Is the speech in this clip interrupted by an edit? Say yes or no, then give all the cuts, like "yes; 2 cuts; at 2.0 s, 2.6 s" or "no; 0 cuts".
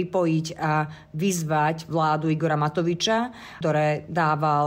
yes; 1 cut; at 3.6 s